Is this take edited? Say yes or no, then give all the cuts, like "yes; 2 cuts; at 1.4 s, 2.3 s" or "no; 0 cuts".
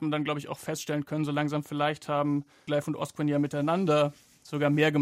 no; 0 cuts